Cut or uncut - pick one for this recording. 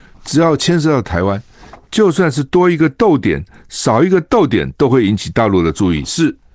uncut